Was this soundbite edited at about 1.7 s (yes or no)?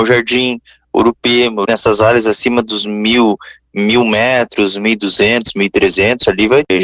yes